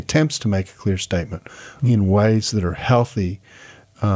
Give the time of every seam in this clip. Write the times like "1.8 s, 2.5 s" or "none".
1.8 s